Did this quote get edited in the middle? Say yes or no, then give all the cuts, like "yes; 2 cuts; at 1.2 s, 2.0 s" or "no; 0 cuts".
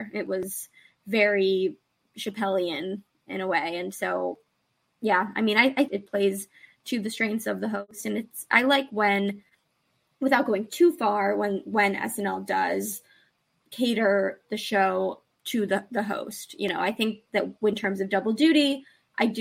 yes; 1 cut; at 5.9 s